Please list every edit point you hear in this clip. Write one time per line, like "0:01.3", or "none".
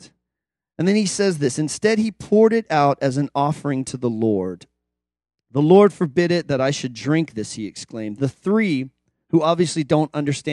0:08.2